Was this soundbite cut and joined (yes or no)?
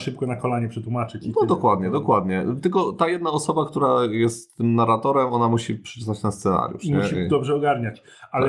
no